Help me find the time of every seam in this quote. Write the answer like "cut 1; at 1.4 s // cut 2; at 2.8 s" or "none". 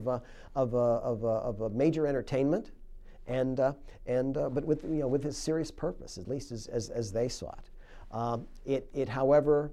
cut 1; at 6.7 s